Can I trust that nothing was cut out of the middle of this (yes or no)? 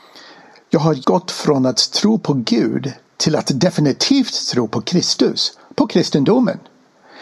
no